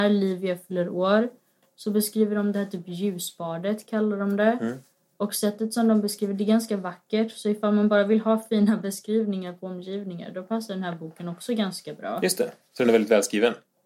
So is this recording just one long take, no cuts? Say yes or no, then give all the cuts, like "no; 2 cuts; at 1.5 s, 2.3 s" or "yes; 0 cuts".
yes; 0 cuts